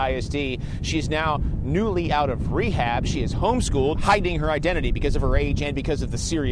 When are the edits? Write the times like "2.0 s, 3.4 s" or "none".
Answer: 3.9 s